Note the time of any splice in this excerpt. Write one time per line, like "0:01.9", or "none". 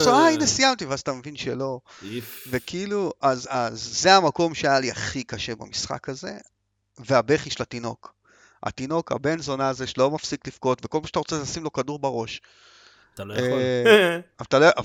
none

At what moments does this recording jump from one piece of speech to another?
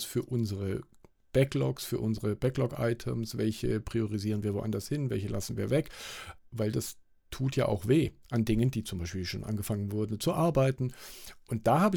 0:06.4

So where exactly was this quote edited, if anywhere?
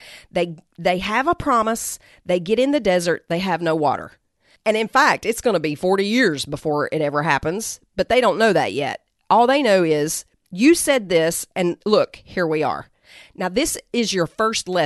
0:04.6

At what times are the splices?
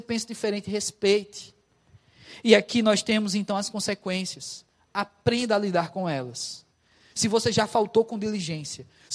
none

